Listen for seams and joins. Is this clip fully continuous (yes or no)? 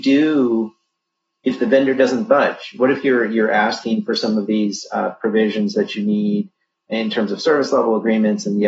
yes